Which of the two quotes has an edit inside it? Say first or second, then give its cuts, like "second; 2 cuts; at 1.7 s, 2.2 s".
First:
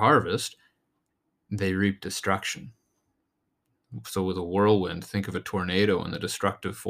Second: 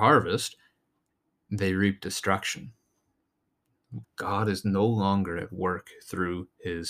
second; 1 cut; at 4.0 s